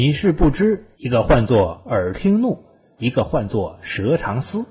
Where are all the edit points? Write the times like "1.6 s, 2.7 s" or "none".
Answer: 0.9 s, 3.0 s